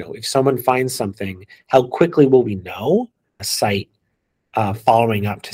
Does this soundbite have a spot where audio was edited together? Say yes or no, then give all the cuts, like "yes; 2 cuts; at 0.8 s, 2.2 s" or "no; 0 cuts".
yes; 1 cut; at 3.4 s